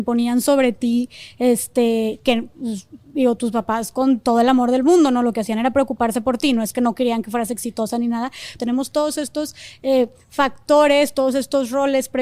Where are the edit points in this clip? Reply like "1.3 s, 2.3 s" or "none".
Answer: 8.6 s